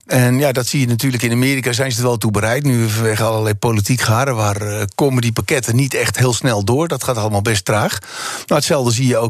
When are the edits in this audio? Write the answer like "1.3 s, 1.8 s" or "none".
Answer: none